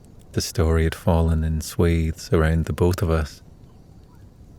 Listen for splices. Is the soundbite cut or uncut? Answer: uncut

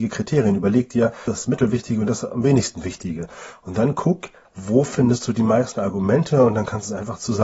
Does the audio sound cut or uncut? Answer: cut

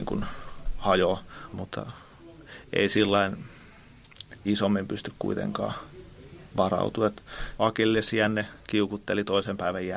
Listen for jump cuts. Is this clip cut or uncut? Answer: cut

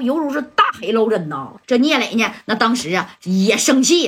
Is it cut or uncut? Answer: cut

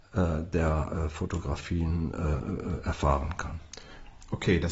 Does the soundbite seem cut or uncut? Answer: uncut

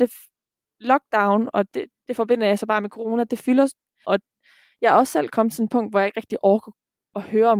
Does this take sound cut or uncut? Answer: cut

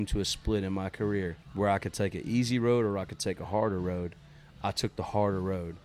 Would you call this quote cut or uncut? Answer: cut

